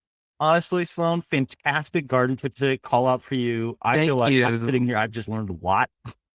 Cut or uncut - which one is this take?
uncut